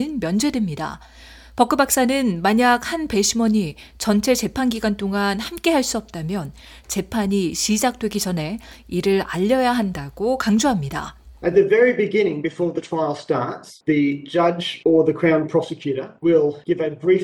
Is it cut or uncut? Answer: uncut